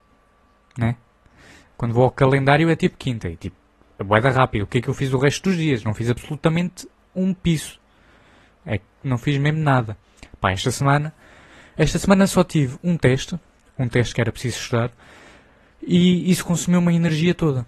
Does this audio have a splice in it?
yes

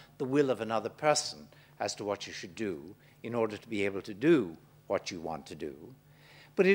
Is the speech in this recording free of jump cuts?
yes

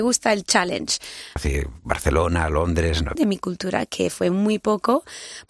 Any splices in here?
yes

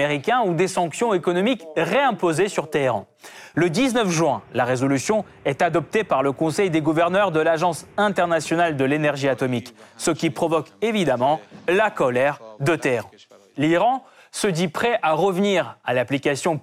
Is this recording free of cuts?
no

